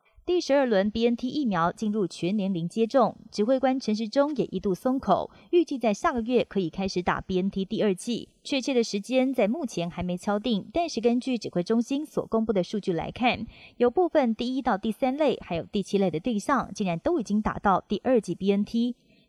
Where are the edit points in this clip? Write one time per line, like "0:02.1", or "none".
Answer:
none